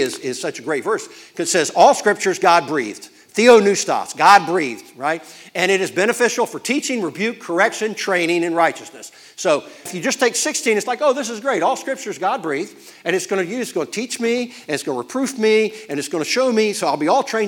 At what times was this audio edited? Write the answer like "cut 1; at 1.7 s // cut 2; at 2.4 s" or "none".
cut 1; at 9.9 s